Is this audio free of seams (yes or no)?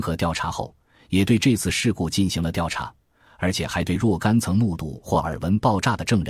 yes